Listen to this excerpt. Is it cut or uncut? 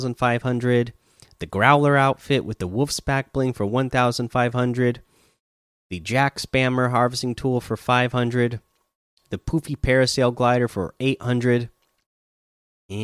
uncut